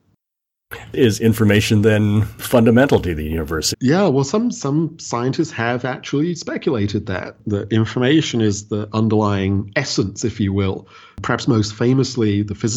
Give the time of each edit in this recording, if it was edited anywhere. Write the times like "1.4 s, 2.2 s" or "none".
3.7 s